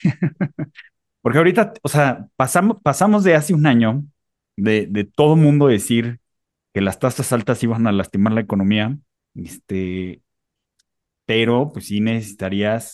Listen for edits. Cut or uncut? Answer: cut